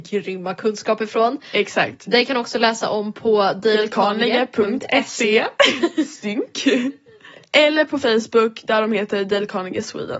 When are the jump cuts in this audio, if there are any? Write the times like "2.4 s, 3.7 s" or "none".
none